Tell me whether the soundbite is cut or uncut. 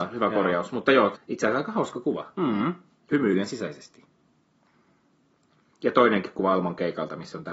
cut